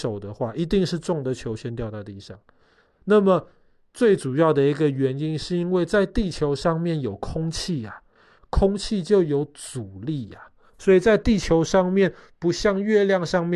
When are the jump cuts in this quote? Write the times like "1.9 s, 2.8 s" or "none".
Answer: none